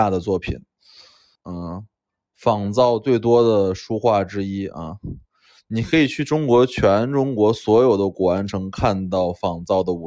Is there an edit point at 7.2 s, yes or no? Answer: no